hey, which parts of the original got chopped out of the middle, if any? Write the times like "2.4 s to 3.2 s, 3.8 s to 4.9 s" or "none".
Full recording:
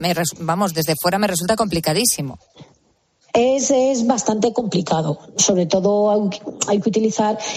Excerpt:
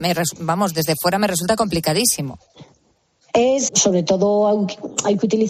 3.7 s to 5.3 s